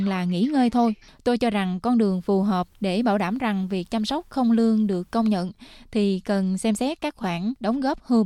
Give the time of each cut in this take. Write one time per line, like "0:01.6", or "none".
0:01.1